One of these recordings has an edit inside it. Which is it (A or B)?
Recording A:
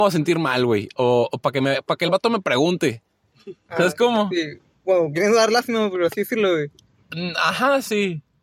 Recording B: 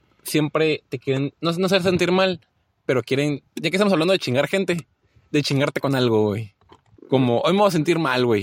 B